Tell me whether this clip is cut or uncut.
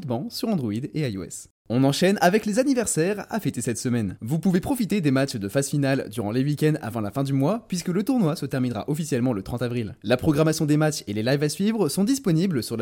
cut